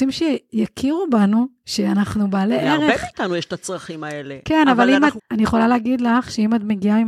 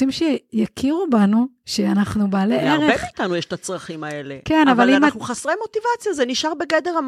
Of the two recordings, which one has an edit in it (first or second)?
first